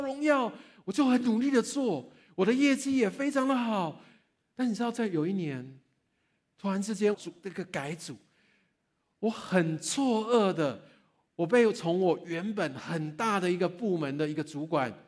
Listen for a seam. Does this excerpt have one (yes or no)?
yes